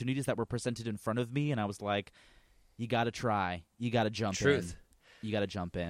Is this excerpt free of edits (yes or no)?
yes